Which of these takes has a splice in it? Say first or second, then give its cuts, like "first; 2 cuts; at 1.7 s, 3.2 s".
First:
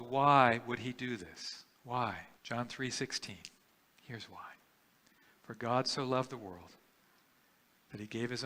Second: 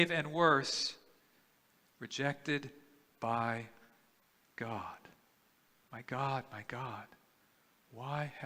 first; 1 cut; at 2.4 s